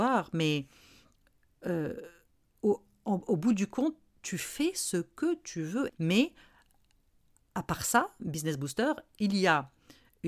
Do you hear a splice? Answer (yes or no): yes